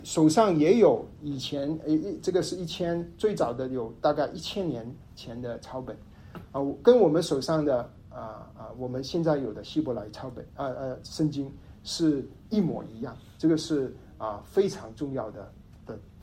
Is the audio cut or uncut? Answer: uncut